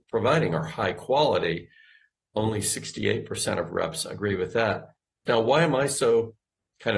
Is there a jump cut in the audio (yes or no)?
yes